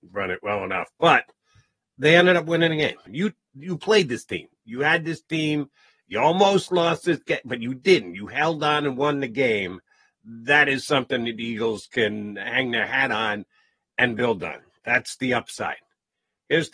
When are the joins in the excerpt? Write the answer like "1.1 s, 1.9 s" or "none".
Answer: 3.1 s